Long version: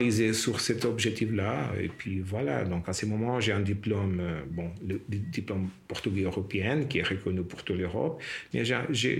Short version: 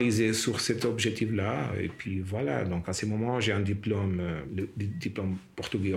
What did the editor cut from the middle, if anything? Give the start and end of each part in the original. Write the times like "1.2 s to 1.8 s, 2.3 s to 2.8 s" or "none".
4.5 s to 4.8 s